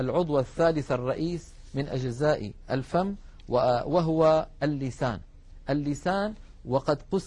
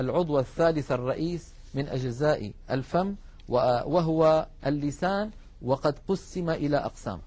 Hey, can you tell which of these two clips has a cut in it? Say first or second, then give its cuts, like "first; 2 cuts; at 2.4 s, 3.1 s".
second; 1 cut; at 4.6 s